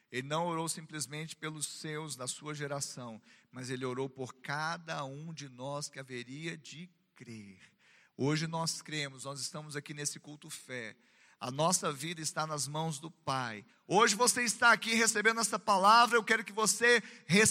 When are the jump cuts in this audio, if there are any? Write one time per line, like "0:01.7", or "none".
0:13.7